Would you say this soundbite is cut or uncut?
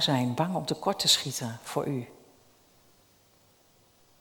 uncut